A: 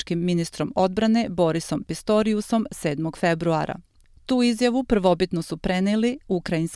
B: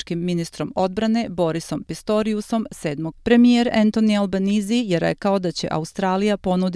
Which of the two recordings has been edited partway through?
B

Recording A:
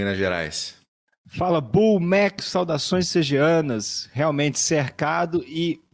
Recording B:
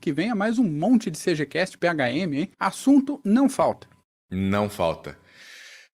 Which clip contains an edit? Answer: B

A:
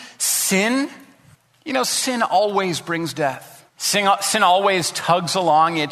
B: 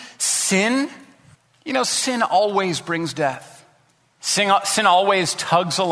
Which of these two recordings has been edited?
A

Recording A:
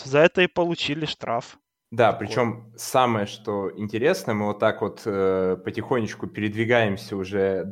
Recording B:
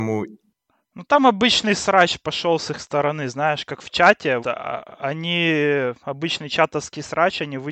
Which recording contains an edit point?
B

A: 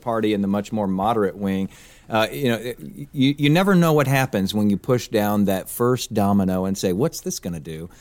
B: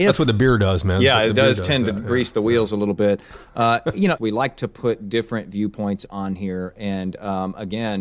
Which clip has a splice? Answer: B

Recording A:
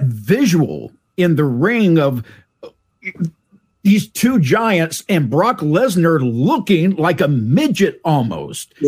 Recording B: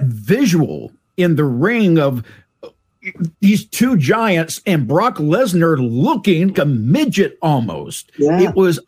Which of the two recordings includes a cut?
B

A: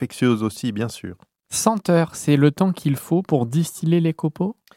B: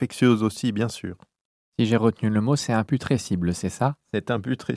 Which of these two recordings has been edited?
A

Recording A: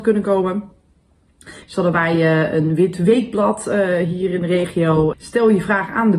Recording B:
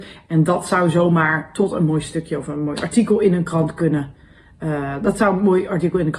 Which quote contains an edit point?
A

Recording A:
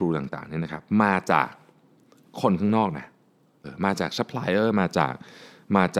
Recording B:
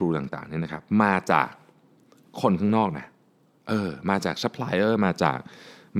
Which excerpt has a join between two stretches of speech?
A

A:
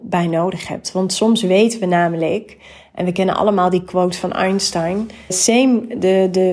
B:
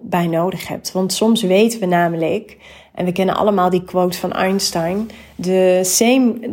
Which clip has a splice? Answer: A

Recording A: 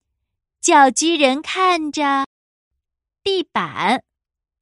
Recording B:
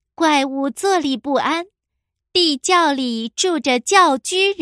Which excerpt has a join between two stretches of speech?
B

